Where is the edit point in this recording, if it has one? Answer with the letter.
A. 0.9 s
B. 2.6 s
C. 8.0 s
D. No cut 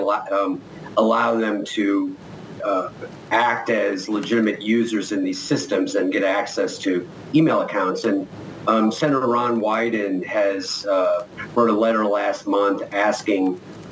B